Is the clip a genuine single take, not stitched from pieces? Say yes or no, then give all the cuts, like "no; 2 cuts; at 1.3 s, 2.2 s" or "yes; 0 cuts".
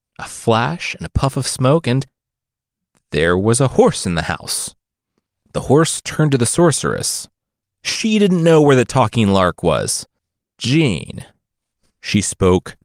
no; 2 cuts; at 7.6 s, 10.4 s